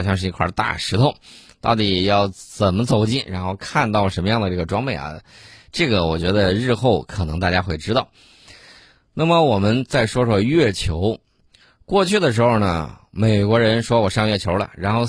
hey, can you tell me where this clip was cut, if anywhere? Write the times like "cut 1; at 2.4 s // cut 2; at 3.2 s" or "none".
none